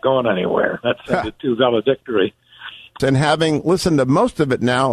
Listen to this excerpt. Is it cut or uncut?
cut